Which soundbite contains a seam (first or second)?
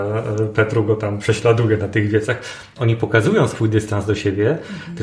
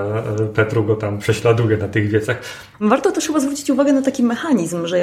second